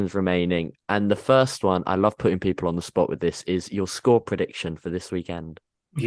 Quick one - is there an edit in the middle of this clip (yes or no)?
no